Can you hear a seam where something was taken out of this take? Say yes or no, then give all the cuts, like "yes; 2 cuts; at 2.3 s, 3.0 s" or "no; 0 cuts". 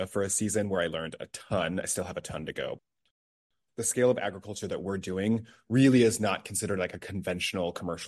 no; 0 cuts